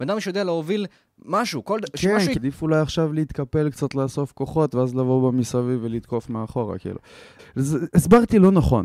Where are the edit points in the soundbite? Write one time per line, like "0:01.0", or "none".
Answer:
0:02.4
0:07.4

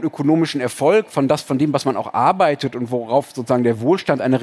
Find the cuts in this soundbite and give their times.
none

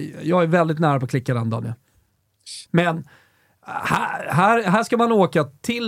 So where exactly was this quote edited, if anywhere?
0:02.7

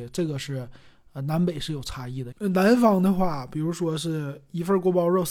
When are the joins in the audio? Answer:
0:02.3

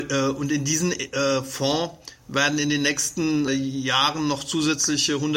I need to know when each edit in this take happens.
0:03.5

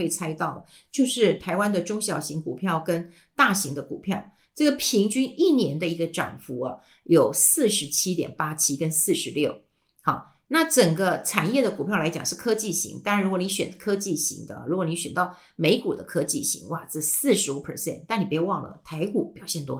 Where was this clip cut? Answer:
none

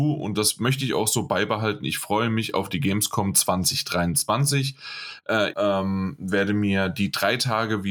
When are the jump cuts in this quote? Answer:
0:05.5

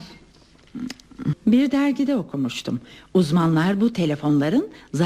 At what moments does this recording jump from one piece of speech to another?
0:01.3

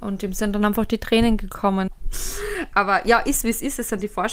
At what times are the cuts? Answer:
0:01.9

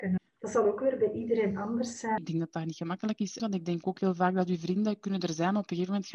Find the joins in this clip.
0:02.2
0:03.4

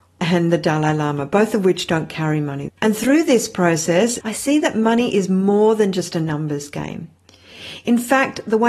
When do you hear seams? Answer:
0:02.7
0:04.2

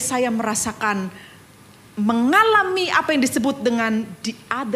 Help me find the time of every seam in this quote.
none

